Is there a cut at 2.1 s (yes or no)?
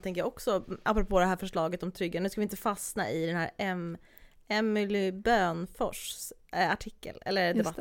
no